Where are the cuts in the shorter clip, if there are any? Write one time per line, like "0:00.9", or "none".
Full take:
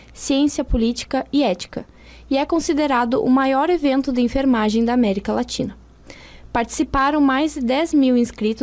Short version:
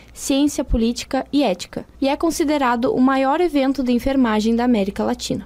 0:01.9